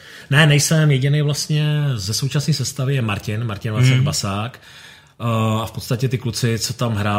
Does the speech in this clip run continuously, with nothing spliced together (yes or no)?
yes